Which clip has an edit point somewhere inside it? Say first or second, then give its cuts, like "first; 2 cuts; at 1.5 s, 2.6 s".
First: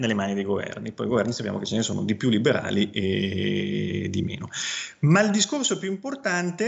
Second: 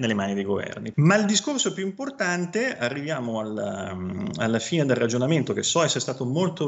second; 1 cut; at 0.9 s